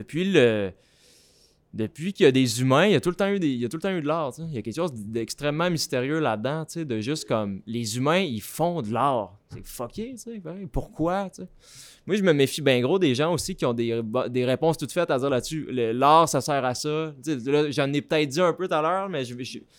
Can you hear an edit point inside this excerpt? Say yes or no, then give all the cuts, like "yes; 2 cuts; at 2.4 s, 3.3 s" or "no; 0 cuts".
no; 0 cuts